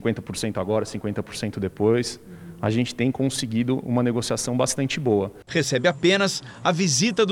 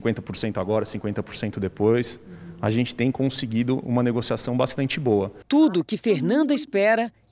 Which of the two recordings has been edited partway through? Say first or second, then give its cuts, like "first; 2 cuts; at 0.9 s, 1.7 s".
first; 1 cut; at 5.5 s